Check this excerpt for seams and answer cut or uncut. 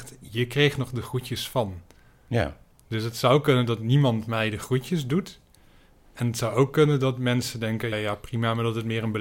cut